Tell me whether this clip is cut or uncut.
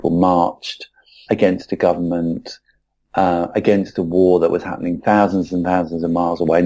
cut